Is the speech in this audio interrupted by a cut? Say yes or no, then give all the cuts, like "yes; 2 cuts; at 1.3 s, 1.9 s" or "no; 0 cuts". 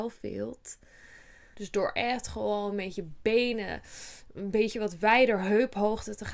yes; 1 cut; at 1.5 s